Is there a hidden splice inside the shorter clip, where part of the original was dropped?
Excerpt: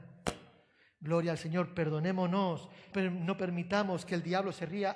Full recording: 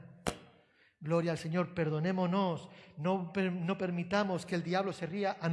yes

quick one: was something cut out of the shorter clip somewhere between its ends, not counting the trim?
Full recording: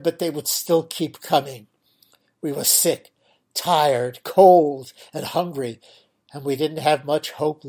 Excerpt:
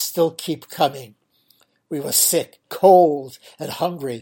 yes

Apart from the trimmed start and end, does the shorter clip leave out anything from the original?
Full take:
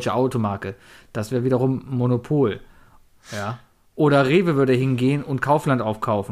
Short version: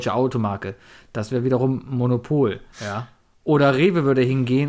yes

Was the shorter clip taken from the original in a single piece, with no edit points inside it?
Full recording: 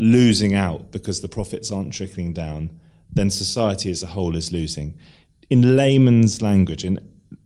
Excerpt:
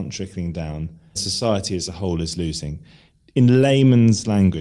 no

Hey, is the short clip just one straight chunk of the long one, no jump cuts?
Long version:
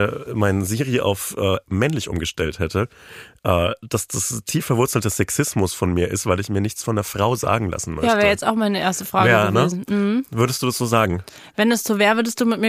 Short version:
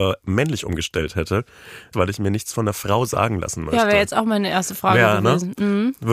no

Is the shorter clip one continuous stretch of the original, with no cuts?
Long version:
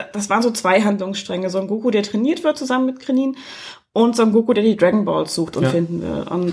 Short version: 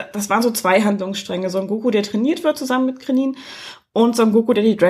yes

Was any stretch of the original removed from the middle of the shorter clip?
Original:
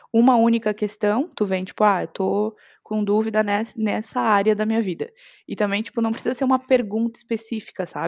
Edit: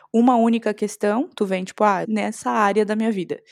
yes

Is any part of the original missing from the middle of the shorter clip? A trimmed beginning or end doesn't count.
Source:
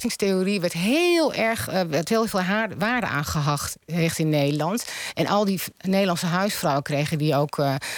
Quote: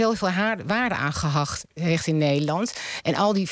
no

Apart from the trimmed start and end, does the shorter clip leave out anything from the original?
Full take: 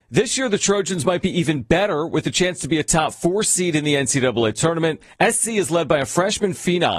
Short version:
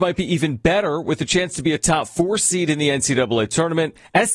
no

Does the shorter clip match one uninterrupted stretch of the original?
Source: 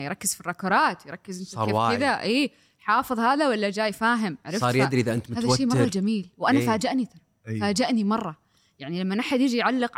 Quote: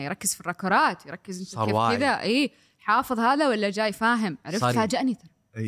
no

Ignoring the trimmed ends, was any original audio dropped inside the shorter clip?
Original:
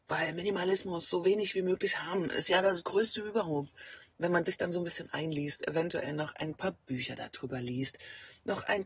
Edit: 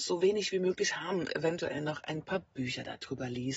yes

